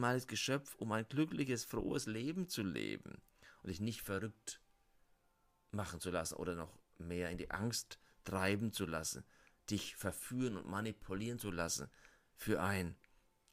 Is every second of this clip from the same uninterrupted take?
yes; 0 cuts

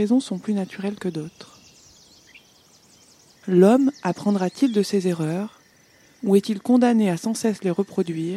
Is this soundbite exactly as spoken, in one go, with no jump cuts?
no; 1 cut; at 3.4 s

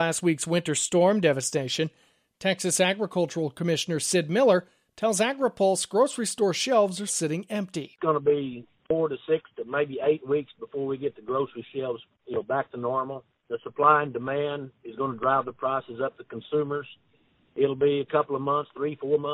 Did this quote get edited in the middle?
yes; 1 cut; at 7.1 s

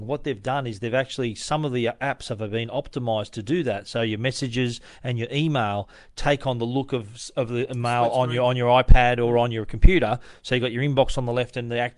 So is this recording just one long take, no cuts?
yes; 0 cuts

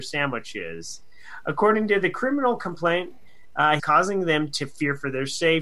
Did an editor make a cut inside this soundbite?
yes; 1 cut; at 3.8 s

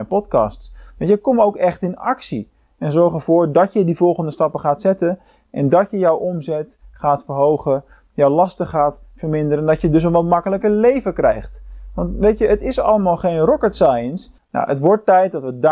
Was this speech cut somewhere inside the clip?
yes; 1 cut; at 14.4 s

